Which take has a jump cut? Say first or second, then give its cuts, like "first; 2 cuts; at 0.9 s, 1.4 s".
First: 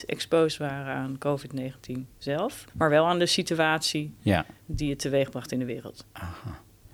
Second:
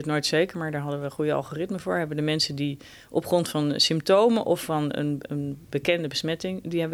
first; 1 cut; at 2.7 s